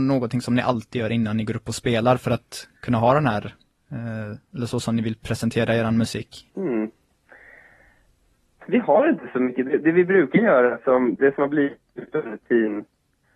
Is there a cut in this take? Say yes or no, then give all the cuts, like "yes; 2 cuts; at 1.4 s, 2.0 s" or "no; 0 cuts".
yes; 2 cuts; at 6.5 s, 11.2 s